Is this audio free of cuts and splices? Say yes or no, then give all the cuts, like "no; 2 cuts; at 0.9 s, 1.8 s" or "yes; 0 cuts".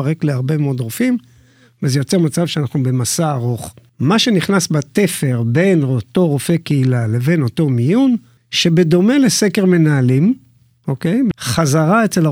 no; 2 cuts; at 8.4 s, 11.3 s